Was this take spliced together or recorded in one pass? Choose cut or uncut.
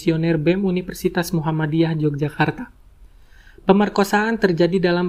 uncut